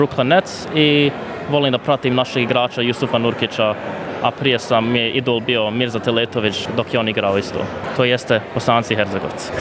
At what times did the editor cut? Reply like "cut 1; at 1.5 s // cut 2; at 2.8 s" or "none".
cut 1; at 7.9 s